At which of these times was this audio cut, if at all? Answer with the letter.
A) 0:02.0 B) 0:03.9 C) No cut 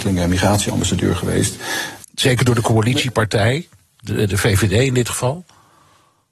A